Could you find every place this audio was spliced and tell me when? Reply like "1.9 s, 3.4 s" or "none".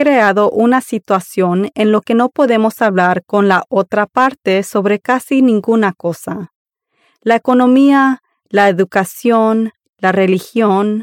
none